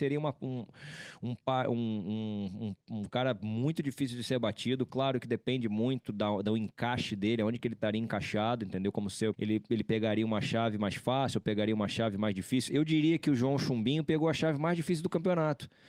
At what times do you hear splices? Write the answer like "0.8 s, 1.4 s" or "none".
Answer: 9.3 s